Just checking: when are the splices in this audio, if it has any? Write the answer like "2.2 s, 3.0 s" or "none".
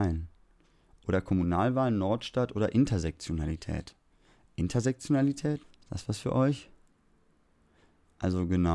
5.6 s